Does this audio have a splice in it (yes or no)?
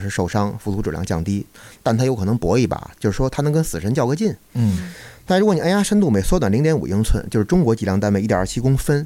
no